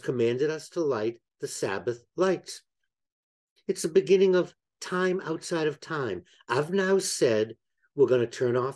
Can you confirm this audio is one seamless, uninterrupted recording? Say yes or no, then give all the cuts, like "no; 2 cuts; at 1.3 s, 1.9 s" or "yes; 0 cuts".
yes; 0 cuts